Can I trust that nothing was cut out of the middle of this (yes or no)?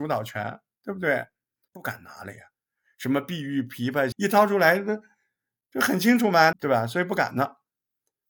no